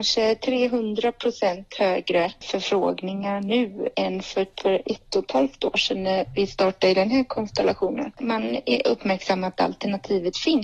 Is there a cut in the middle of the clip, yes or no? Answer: yes